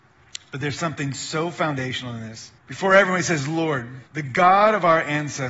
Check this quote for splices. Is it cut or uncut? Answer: cut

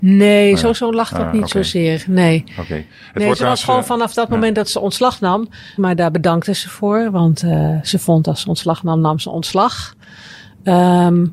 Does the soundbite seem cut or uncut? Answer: cut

